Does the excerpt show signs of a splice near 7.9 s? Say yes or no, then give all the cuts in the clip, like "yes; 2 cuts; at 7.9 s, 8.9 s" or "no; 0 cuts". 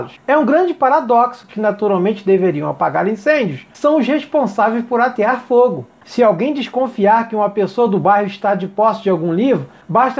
no; 2 cuts; at 1.5 s, 6.0 s